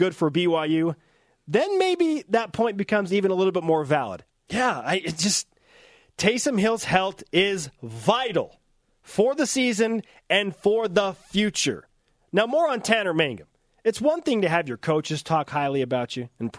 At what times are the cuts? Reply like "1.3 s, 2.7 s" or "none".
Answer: 4.3 s